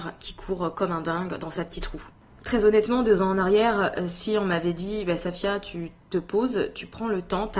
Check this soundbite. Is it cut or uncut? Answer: uncut